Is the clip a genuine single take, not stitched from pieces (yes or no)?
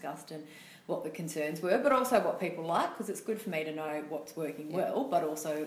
yes